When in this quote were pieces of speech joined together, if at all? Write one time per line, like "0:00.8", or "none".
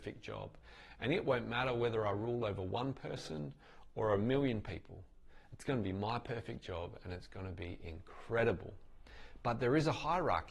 none